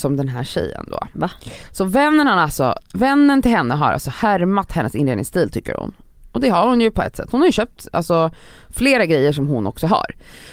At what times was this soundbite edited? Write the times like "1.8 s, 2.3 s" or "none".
none